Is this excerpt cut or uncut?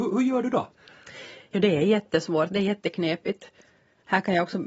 uncut